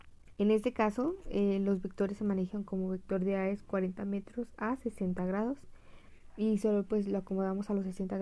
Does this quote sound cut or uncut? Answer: uncut